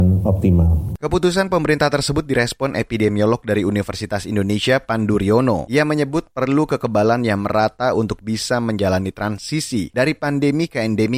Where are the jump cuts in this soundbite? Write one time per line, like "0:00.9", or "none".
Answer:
none